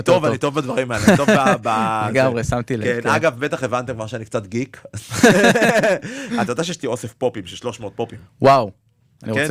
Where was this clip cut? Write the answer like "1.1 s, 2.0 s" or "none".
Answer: none